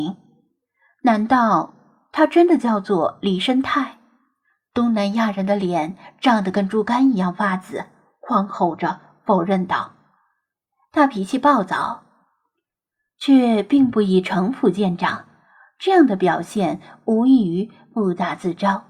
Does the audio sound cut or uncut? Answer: cut